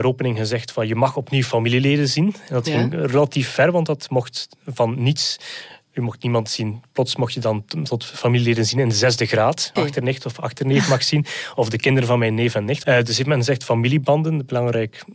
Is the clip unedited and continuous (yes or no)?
no